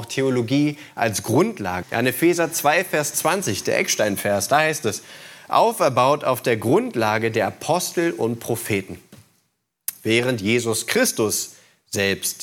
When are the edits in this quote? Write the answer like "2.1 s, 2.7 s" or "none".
1.8 s